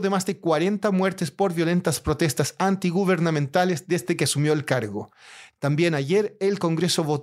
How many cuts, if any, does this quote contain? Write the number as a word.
zero